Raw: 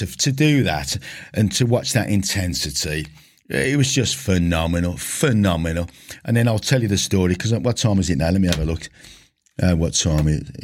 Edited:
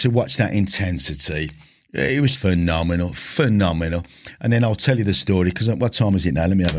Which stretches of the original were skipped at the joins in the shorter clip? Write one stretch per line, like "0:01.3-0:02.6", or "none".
0:03.9-0:04.2